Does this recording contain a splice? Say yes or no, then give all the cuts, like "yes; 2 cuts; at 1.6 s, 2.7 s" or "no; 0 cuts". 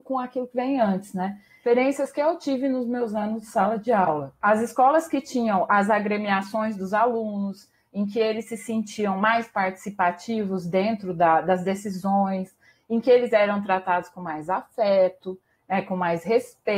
no; 0 cuts